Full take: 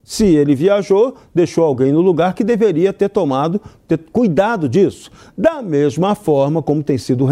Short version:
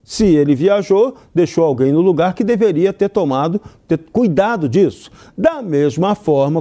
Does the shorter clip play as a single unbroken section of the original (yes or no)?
yes